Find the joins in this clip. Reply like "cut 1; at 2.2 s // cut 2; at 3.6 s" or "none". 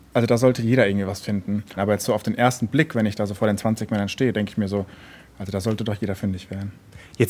cut 1; at 1.8 s